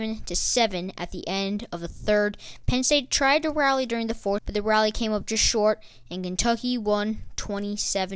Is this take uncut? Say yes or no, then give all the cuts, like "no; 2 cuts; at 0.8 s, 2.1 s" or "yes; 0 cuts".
no; 1 cut; at 4.4 s